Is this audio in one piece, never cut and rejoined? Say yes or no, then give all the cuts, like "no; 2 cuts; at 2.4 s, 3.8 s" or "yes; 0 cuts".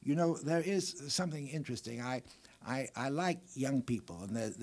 yes; 0 cuts